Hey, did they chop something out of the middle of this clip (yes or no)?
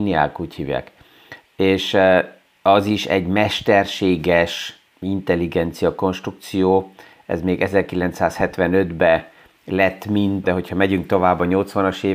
yes